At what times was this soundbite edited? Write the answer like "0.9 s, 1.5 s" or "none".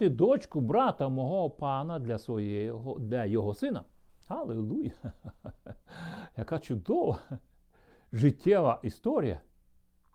none